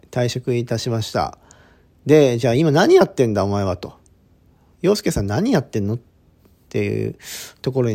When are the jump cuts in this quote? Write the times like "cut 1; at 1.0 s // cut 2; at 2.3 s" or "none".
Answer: none